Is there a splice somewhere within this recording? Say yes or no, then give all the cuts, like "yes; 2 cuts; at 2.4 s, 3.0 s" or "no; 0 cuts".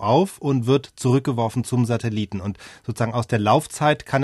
no; 0 cuts